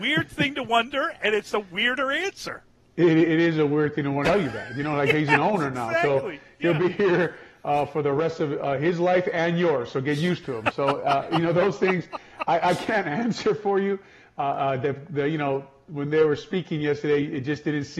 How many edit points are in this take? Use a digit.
1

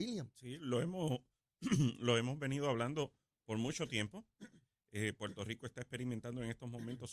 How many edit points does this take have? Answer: 0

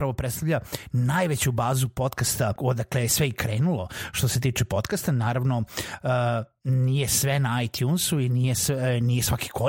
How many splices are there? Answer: 1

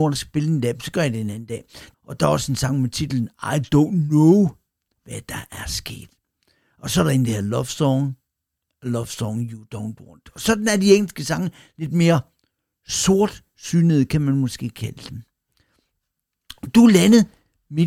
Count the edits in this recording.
2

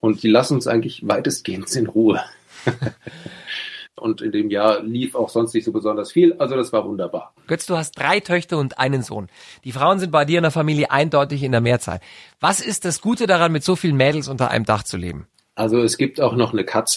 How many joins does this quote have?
1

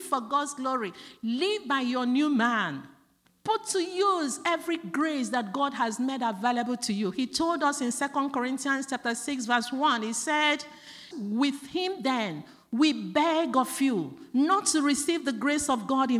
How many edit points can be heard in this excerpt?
1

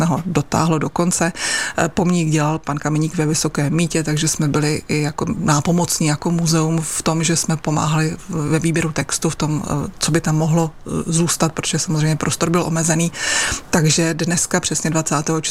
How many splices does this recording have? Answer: 0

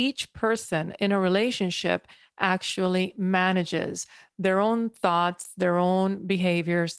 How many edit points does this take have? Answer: 0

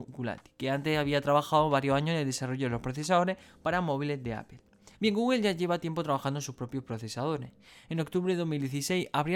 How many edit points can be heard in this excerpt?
1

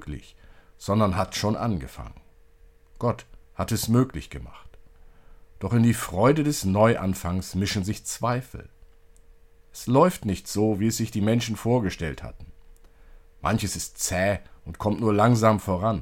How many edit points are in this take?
0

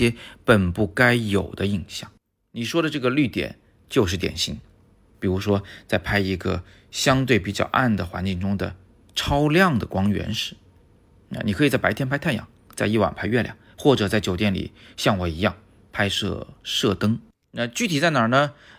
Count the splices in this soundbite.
2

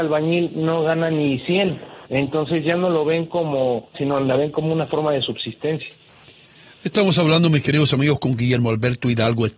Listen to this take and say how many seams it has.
2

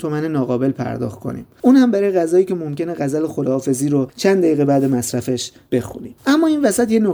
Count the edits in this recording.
0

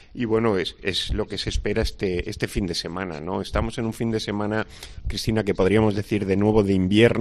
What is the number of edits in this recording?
0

